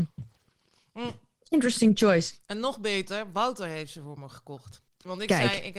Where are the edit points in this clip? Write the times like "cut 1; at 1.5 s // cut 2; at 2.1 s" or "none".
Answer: cut 1; at 4.9 s

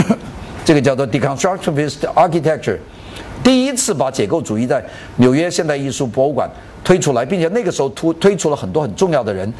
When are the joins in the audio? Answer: none

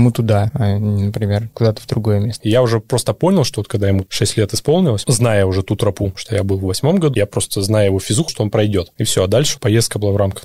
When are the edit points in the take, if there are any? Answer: cut 1; at 2.4 s // cut 2; at 7.1 s // cut 3; at 8.3 s

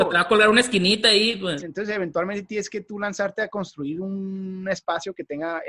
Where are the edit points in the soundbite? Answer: cut 1; at 1.6 s

